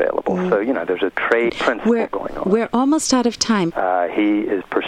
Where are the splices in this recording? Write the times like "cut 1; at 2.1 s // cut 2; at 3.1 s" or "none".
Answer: cut 1; at 1.5 s // cut 2; at 3.7 s